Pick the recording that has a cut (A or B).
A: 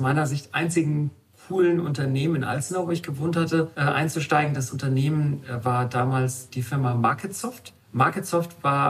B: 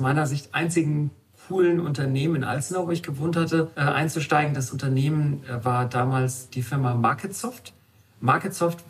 A